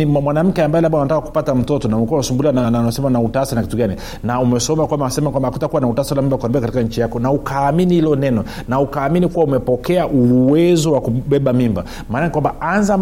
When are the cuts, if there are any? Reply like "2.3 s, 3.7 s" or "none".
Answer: 2.6 s